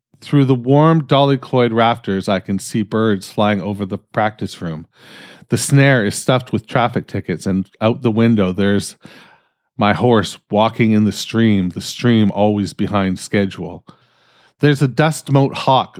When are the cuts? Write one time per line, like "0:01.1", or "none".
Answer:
none